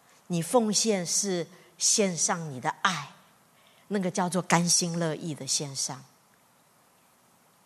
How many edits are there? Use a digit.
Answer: 1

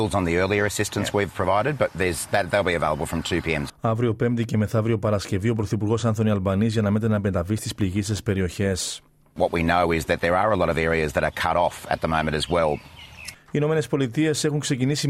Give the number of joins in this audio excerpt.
3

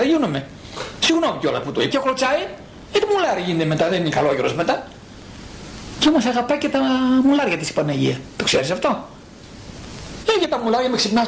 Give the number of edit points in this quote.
2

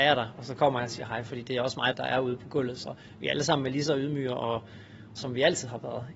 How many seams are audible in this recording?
2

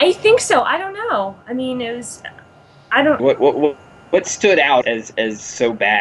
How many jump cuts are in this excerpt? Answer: 2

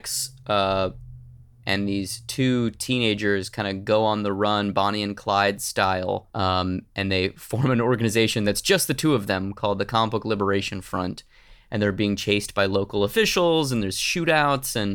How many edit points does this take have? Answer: 2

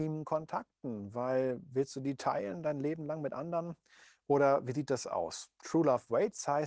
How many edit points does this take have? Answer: 0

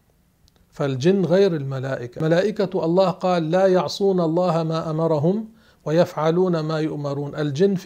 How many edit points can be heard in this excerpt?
1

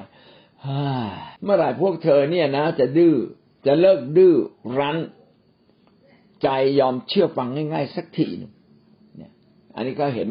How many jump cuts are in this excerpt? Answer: 1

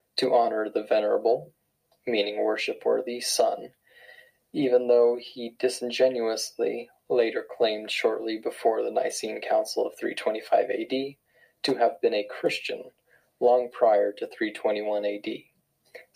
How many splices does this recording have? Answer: 0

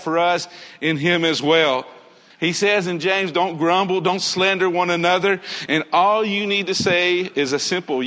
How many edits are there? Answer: 2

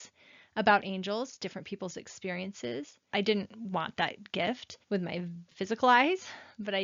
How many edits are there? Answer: 2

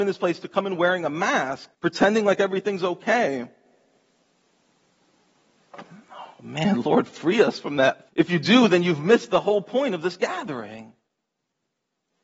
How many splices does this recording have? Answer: 2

